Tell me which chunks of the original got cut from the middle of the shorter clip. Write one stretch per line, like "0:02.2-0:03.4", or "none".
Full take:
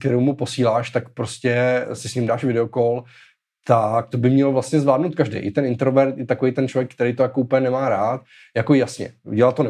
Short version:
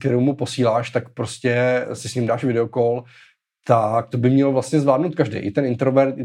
none